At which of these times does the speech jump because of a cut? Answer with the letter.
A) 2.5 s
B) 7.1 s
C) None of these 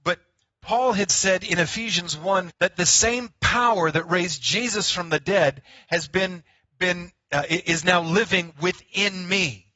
A